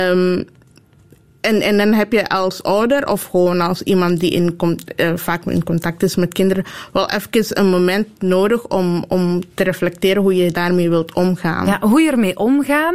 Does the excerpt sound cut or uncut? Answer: uncut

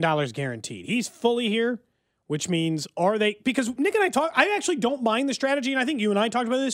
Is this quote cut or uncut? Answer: uncut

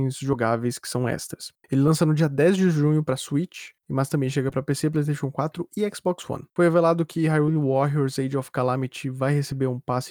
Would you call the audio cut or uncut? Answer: cut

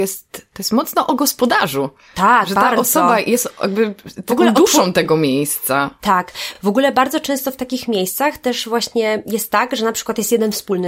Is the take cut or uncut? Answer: uncut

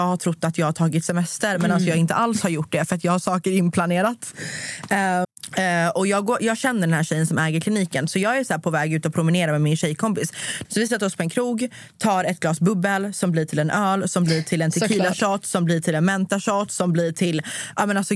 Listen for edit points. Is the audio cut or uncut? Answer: cut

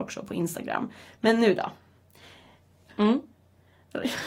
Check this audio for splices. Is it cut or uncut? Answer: cut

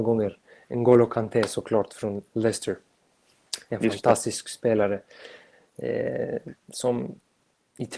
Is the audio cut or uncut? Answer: uncut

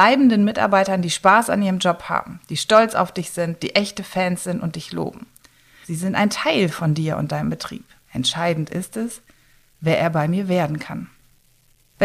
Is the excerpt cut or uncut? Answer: cut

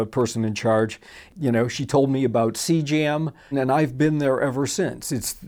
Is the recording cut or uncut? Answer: cut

